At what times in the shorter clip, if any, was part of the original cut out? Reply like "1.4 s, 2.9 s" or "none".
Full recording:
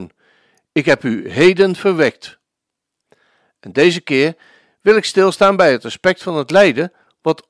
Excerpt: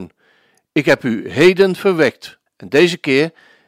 2.5 s

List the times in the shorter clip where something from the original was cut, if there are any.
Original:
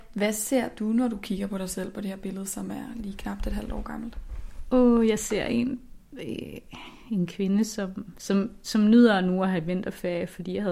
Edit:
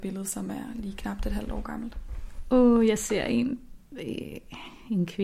none

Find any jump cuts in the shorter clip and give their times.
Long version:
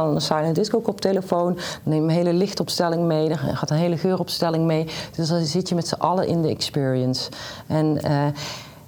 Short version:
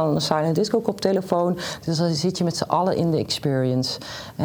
1.8 s

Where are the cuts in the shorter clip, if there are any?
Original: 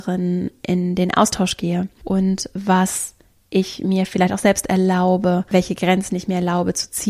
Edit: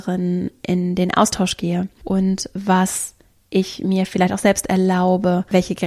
none

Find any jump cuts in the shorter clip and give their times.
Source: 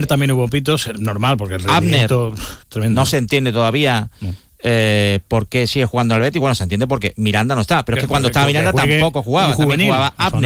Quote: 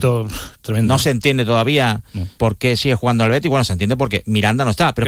2.4 s

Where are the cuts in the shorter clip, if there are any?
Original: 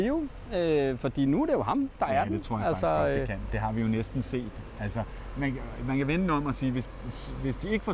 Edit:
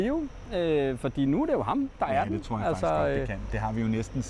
none

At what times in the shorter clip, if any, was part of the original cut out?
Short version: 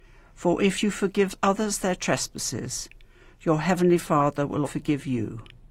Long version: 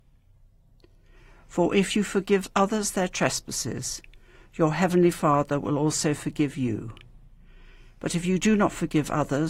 4.7 s

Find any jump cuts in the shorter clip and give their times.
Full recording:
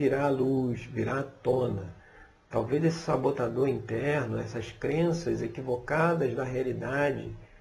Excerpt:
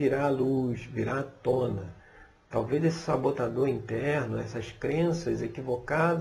none

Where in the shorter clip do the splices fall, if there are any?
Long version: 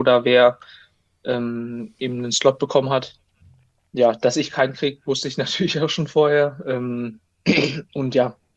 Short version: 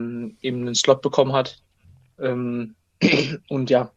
2.2 s

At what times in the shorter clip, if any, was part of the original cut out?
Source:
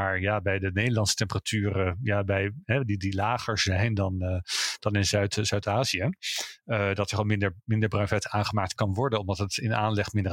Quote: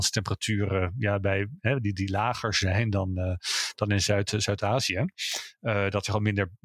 none

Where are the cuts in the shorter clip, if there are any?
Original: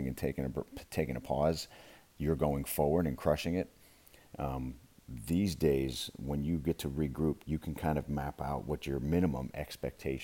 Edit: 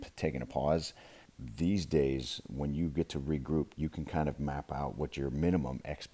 1.3 s

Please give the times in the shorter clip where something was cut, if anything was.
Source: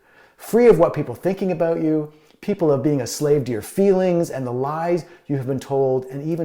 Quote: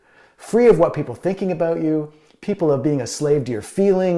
none

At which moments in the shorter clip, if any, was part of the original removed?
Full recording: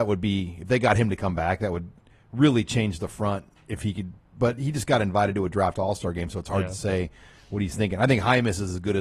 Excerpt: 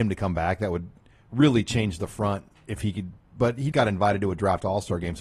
3.7 s

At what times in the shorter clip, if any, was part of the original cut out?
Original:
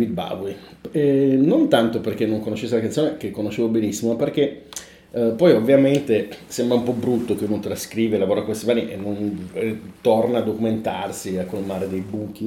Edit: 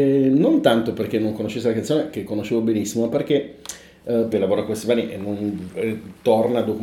4.3 s

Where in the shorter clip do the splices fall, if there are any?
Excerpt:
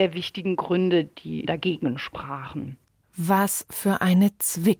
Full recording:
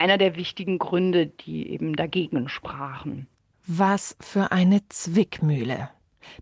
1.4 s

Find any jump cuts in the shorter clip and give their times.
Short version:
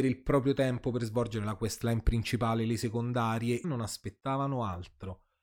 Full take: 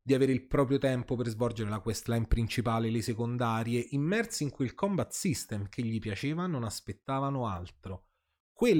3.6 s

